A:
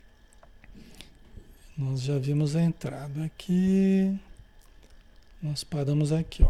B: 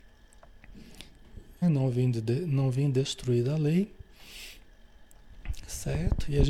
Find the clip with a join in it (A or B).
B